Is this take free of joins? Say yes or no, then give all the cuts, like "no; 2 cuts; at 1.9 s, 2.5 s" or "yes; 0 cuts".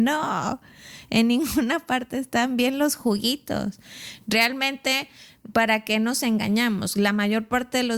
yes; 0 cuts